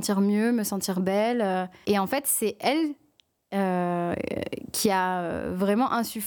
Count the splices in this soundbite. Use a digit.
0